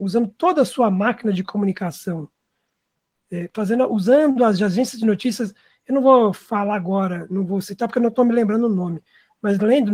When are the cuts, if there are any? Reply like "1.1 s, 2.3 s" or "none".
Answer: 3.5 s

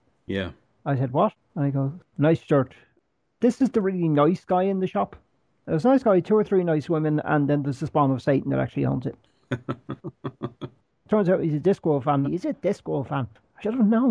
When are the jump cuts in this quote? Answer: 2.1 s, 12.2 s

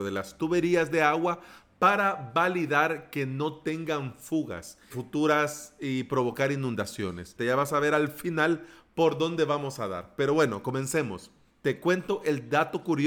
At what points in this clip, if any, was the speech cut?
4.9 s, 7.4 s, 11.5 s

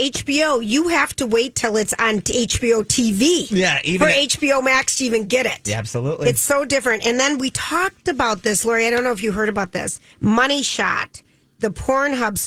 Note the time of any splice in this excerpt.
10.1 s

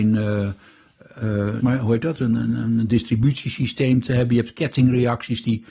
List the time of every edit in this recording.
1.6 s

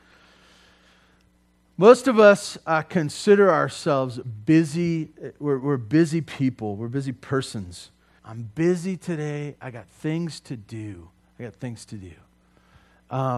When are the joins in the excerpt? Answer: 8.2 s

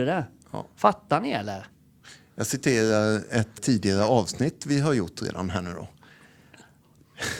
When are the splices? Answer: 3.6 s

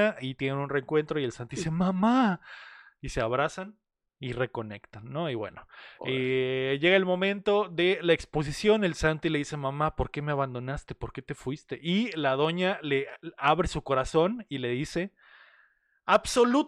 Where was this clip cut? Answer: none

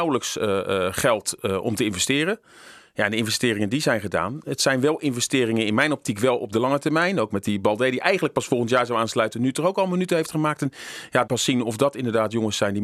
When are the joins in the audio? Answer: 11.3 s

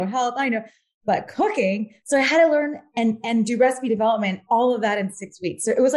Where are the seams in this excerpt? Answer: none

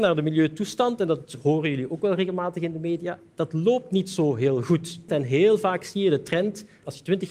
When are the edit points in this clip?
5.1 s

